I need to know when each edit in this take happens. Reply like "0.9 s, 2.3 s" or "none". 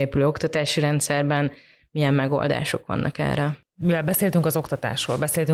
none